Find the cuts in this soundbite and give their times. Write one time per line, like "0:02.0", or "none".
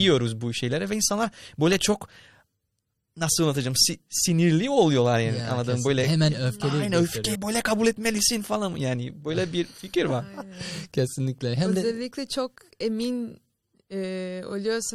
0:07.3